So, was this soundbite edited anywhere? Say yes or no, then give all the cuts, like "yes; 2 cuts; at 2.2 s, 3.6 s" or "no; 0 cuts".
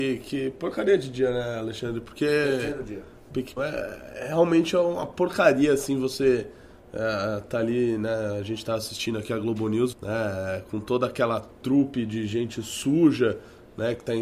yes; 2 cuts; at 3.6 s, 9.9 s